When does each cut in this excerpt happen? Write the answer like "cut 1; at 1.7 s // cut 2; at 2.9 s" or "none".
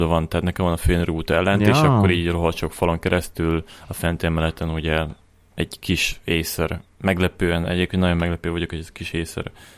none